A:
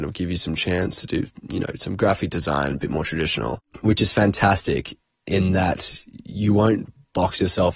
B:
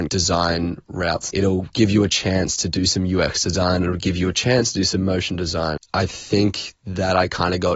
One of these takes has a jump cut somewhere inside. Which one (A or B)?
B